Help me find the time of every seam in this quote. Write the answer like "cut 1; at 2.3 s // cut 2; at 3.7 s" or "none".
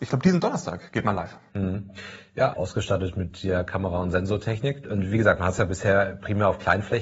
cut 1; at 2.5 s // cut 2; at 4.8 s